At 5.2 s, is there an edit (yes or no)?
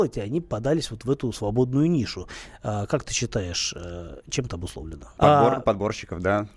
yes